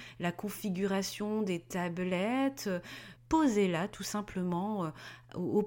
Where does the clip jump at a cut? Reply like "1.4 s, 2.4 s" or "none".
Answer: 3.2 s